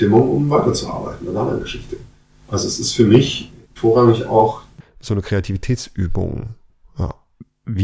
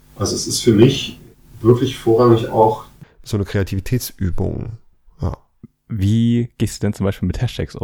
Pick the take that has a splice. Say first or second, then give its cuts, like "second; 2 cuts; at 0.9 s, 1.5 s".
first; 1 cut; at 3.8 s